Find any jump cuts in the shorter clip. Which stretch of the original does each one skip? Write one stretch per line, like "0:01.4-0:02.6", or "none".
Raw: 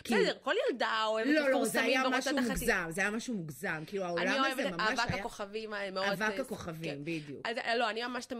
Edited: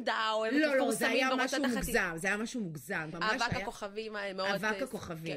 0:03.9-0:04.7